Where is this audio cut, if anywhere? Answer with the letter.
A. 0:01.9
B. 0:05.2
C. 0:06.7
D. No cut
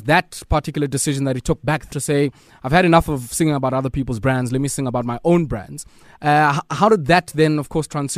A